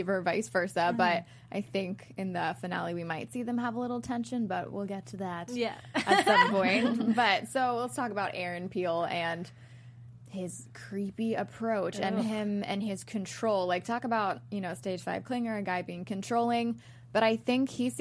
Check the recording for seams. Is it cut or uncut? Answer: uncut